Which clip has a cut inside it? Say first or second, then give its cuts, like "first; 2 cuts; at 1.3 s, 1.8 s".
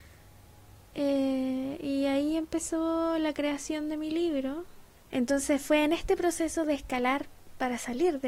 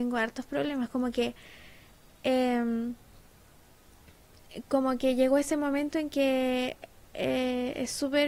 first; 1 cut; at 5.0 s